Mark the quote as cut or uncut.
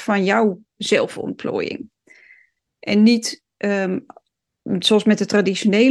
uncut